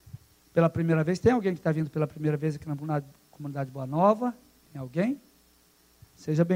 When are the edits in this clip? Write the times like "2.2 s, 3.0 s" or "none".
none